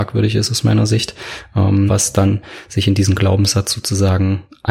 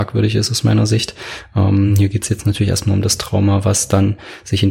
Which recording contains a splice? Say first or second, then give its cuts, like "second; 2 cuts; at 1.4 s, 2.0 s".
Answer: first; 1 cut; at 1.9 s